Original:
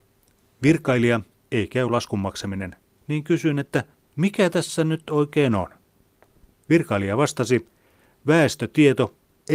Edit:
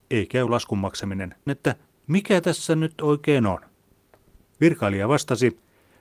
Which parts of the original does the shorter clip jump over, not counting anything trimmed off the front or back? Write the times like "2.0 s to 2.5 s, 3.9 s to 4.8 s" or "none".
2.9 s to 3.6 s